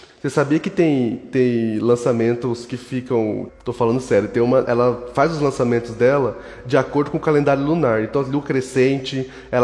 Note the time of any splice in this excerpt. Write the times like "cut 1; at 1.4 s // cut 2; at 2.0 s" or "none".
cut 1; at 3.5 s // cut 2; at 4.6 s